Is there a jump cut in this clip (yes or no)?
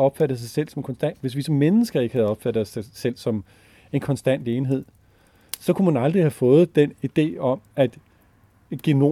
no